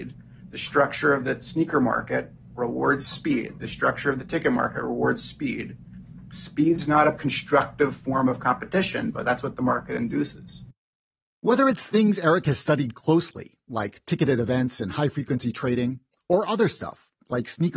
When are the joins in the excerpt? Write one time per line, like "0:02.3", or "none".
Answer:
none